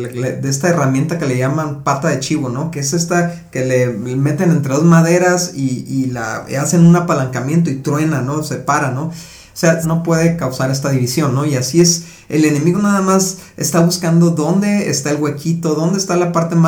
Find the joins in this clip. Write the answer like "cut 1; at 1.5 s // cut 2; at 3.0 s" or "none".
cut 1; at 9.8 s